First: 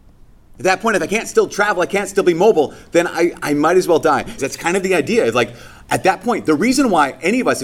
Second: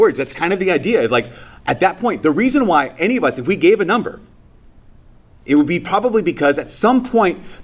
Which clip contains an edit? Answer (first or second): first